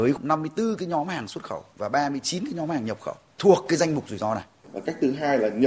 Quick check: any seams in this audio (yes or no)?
yes